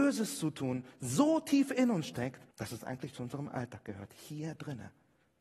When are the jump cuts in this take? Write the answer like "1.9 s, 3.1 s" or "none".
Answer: 2.5 s